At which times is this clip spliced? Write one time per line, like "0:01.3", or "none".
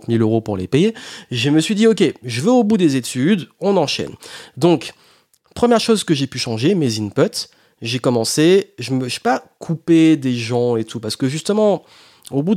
none

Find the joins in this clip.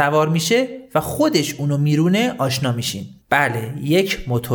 0:03.2

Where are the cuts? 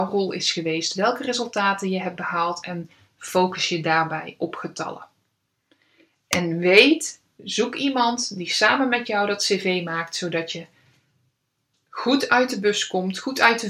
none

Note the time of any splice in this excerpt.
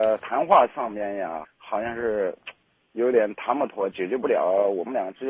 0:01.4

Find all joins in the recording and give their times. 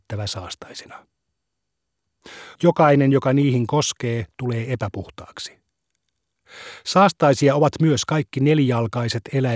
0:02.6

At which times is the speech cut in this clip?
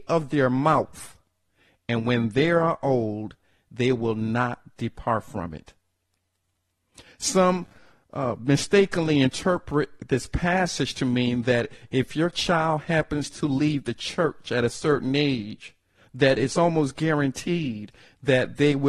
none

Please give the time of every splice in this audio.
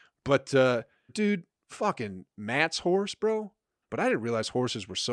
0:01.1
0:03.8

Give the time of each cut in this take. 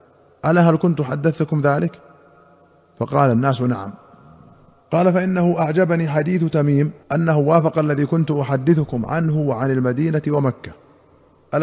0:07.0

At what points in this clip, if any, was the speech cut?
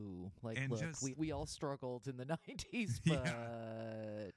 0:01.1

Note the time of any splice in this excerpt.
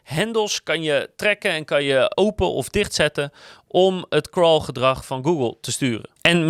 0:02.1

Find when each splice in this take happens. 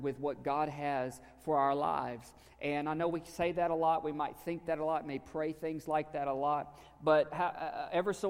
none

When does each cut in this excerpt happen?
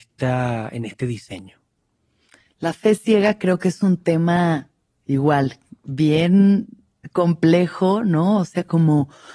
none

